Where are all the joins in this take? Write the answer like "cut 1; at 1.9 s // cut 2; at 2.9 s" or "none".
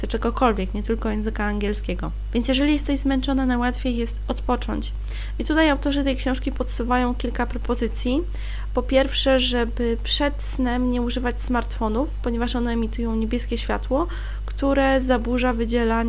none